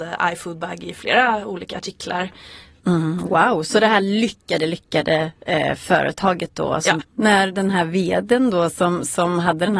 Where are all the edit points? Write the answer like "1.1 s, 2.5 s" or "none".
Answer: 2.8 s, 7.0 s